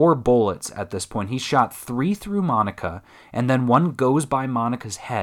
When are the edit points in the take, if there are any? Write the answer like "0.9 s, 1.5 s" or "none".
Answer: none